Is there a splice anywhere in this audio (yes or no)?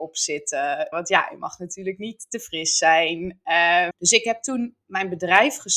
yes